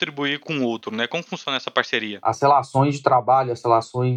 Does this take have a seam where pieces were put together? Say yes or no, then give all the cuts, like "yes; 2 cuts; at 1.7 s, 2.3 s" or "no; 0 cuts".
no; 0 cuts